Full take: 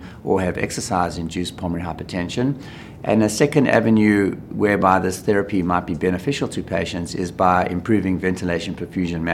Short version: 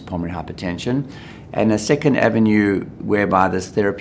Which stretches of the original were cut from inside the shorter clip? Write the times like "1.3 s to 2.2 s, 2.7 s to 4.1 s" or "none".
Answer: none